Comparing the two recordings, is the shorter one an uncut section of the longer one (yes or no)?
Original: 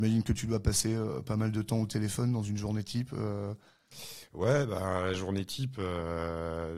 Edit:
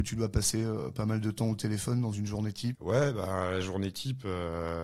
no